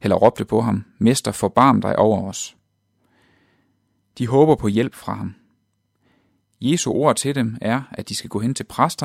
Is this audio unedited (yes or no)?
yes